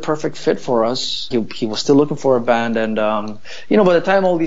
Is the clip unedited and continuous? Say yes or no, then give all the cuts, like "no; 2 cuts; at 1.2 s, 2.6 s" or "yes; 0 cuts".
no; 1 cut; at 1.3 s